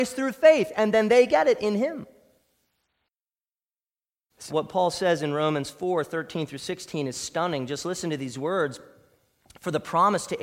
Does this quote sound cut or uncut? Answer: cut